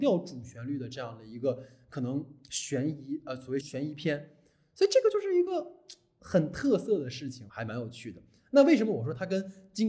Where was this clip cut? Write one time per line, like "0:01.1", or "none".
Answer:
0:03.6
0:07.5